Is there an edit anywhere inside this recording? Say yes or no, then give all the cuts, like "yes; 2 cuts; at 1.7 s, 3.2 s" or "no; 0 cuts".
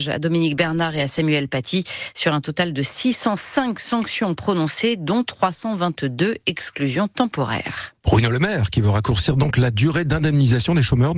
no; 0 cuts